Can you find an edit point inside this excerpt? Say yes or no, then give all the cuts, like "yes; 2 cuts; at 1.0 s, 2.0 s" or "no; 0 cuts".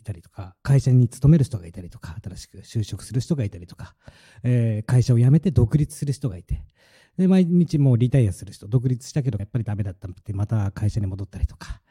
yes; 1 cut; at 9.4 s